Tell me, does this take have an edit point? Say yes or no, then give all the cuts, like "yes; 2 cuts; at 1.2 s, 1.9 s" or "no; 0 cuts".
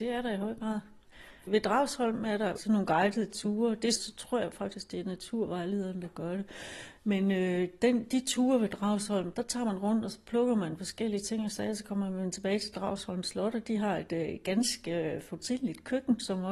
yes; 1 cut; at 4.0 s